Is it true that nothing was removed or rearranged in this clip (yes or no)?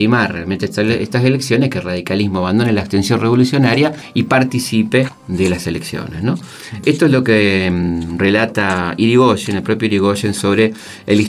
yes